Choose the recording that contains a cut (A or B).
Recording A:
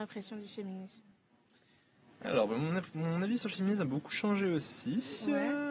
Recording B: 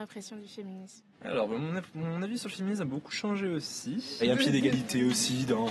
B